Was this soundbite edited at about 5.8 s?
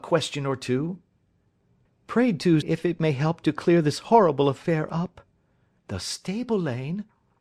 yes; 2 cuts; at 2.6 s, 5.8 s

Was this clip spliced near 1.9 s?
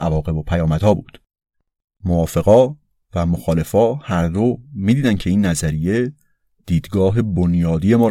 no; 0 cuts

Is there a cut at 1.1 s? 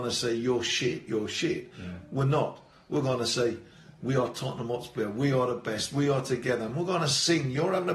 yes; 1 cut; at 1.1 s

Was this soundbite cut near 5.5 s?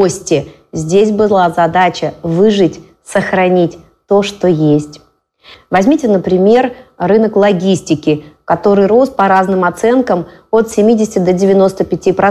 yes; 1 cut; at 5.5 s

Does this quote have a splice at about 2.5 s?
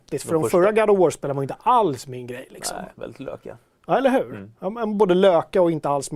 no; 0 cuts

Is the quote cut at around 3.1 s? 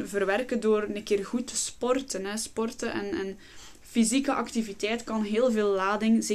no; 0 cuts

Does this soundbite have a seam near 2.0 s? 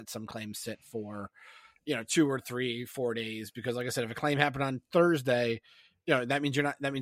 no; 0 cuts

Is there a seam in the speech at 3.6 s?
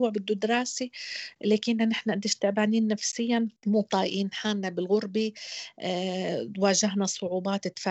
yes; 1 cut; at 3.6 s

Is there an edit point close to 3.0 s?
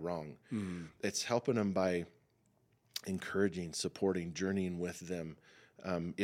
no; 0 cuts

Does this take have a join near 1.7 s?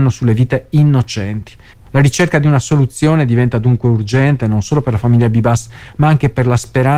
yes; 1 cut; at 1.7 s

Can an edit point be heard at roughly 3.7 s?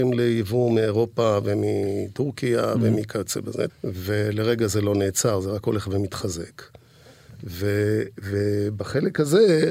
yes; 1 cut; at 3.7 s

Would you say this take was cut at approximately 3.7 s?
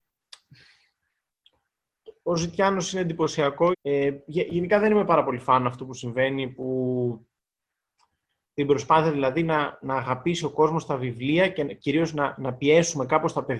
yes; 1 cut; at 3.7 s

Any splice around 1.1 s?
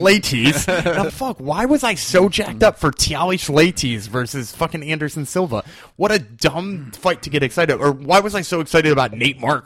yes; 1 cut; at 1.1 s

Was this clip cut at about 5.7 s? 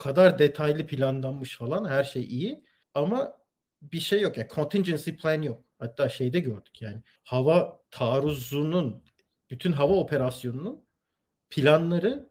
yes; 1 cut; at 5.7 s

